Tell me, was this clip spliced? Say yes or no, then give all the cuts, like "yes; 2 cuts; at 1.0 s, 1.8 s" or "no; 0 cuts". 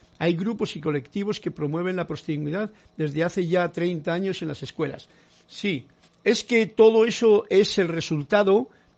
yes; 1 cut; at 6.1 s